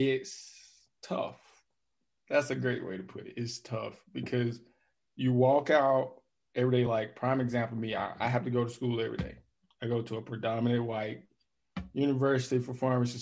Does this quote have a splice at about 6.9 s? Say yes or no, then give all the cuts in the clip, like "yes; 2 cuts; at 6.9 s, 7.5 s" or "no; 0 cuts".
no; 0 cuts